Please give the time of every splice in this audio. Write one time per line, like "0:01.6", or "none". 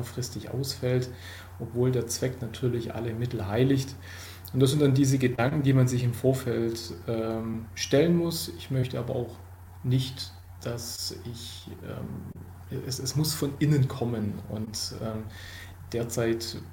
none